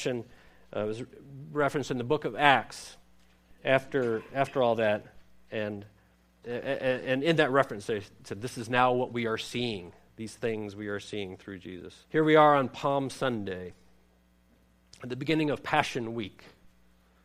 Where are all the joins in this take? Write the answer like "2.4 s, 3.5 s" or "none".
6.4 s, 12.0 s